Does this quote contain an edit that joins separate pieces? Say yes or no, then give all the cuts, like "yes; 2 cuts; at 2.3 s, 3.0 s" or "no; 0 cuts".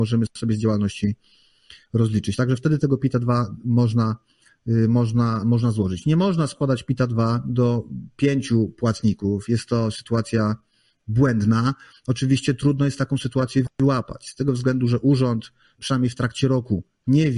no; 0 cuts